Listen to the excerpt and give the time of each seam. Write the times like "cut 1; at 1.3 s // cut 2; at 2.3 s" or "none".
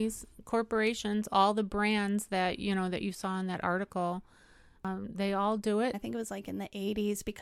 cut 1; at 5.9 s

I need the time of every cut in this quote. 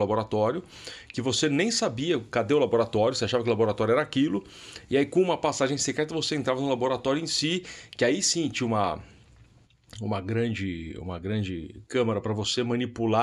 none

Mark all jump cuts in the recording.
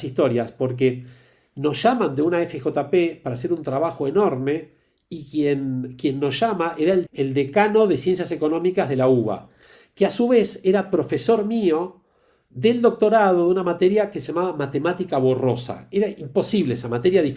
none

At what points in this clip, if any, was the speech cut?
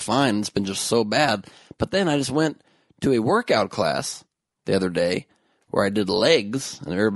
none

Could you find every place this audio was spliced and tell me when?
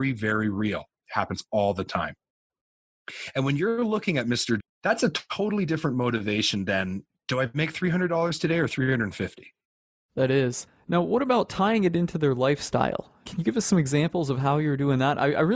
cut 1; at 4.6 s

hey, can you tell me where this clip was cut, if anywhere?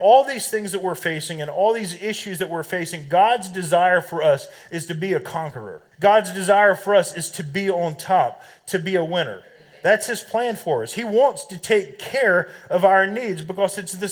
cut 1; at 5.9 s

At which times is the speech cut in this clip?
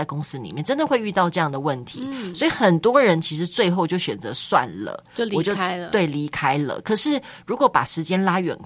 none

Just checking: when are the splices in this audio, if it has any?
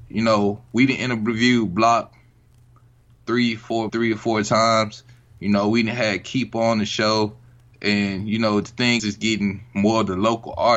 cut 1; at 3.9 s // cut 2; at 9.0 s

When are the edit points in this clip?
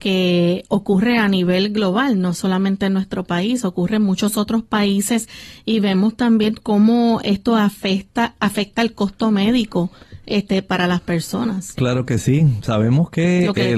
none

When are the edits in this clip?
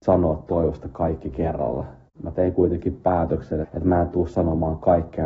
cut 1; at 3.6 s

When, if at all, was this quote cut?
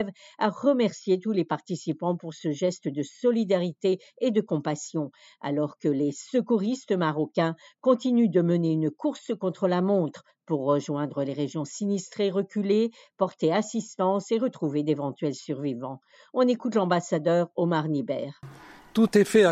none

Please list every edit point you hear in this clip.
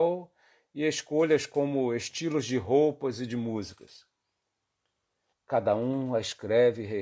cut 1; at 5.3 s

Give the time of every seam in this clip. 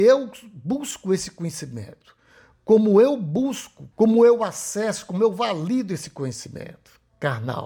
cut 1; at 3.9 s

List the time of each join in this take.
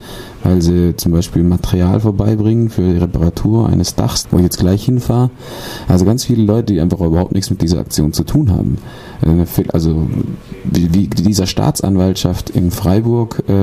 cut 1; at 4.2 s

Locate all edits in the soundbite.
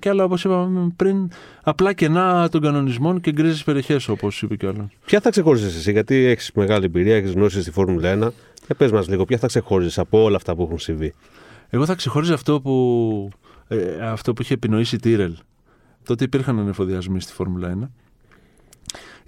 cut 1; at 16.0 s

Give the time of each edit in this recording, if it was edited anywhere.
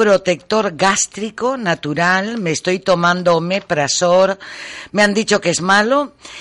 none

